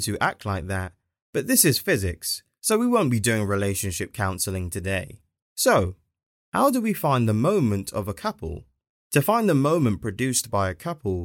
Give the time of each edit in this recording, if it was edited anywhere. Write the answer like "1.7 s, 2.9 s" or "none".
none